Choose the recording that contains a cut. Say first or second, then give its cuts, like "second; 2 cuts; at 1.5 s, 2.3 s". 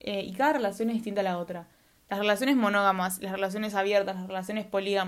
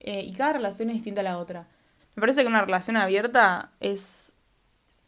second; 1 cut; at 2.0 s